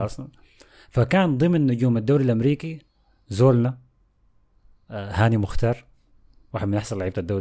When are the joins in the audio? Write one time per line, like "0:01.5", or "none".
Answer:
none

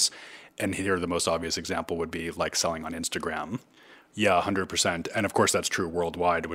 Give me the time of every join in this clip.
0:04.1

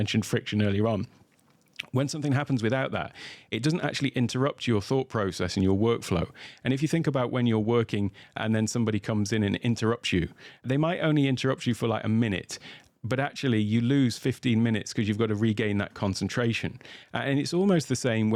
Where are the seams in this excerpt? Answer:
none

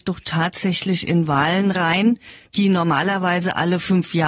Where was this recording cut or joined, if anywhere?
none

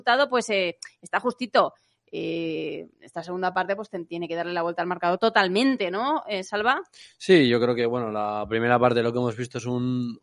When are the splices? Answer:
0:02.9

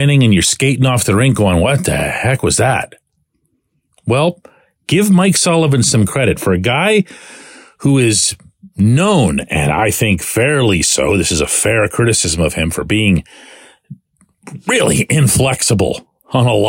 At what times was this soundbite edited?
none

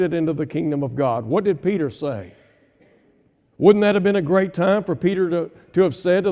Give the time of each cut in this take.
none

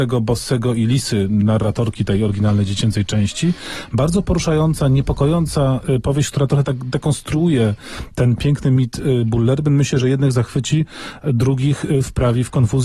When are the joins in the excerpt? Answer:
none

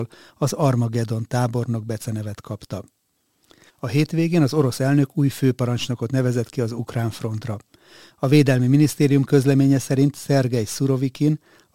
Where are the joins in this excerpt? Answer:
0:03.7

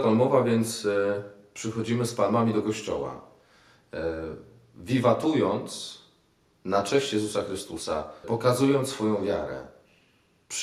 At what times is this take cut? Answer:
0:08.2

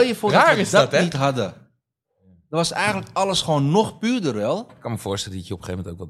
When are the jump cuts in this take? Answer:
0:04.7

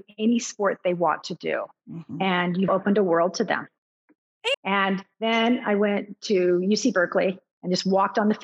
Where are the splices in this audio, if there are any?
0:02.7
0:04.5

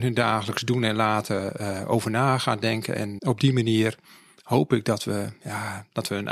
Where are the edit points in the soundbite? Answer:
0:03.2

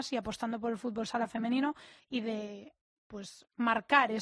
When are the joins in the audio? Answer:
0:02.0

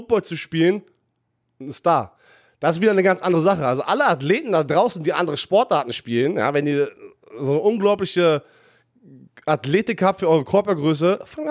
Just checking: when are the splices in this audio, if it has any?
none

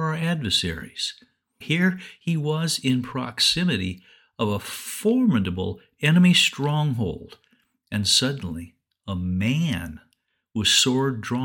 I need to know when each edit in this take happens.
0:01.6

